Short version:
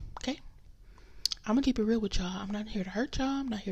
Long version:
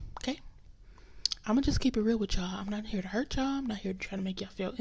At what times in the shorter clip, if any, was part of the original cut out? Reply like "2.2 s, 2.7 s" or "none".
1.6 s

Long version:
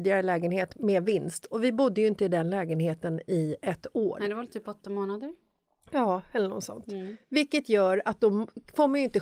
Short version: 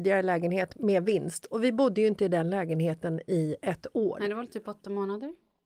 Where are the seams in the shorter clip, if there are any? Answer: none

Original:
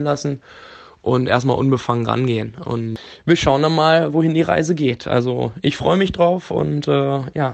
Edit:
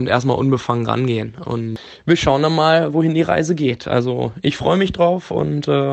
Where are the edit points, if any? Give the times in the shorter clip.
none

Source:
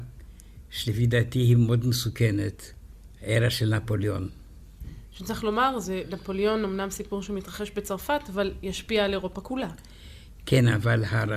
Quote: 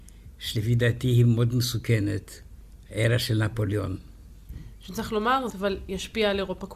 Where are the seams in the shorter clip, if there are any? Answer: 5.5 s

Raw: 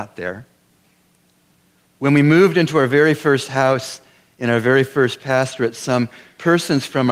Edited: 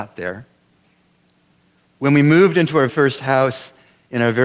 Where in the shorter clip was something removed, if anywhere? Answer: 2.9 s

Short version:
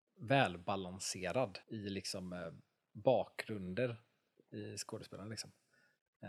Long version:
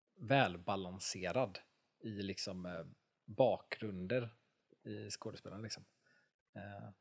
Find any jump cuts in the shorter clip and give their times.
1.6 s

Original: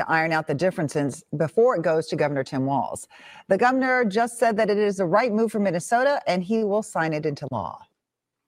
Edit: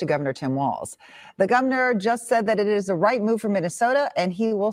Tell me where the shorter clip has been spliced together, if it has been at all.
none

